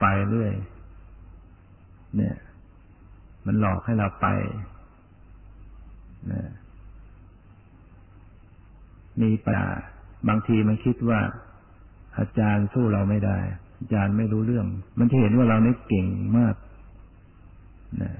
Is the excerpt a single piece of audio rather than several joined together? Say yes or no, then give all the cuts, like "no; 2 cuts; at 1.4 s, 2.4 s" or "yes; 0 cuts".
no; 2 cuts; at 9.5 s, 14.9 s